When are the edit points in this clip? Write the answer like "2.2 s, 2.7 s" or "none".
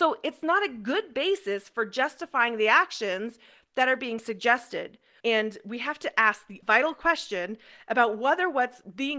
5.2 s, 6.6 s